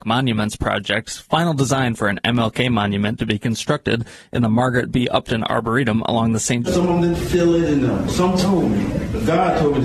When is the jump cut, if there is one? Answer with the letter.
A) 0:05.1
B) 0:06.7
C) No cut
B